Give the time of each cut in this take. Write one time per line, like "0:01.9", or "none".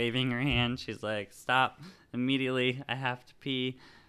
none